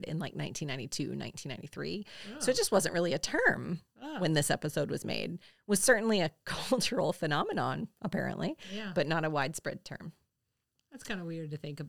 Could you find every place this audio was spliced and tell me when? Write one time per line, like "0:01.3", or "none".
none